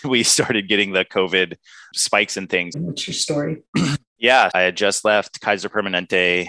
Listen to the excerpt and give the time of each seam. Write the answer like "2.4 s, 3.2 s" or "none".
2.7 s, 4.5 s